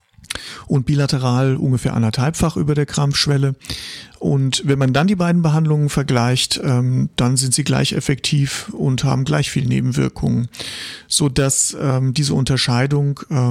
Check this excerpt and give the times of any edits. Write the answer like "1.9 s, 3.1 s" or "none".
none